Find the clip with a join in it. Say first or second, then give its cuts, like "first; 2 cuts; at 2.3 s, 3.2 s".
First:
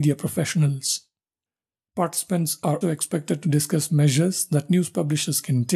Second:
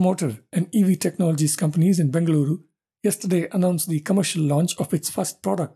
first; 1 cut; at 2.8 s